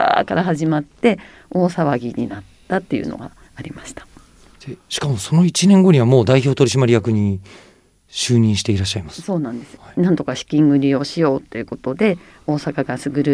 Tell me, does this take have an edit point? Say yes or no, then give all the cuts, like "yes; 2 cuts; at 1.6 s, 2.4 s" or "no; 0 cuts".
yes; 1 cut; at 9.8 s